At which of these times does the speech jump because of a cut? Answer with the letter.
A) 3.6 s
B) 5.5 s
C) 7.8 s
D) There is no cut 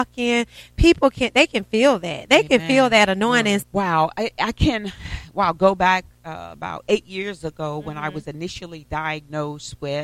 A